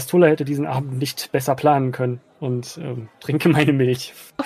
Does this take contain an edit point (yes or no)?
no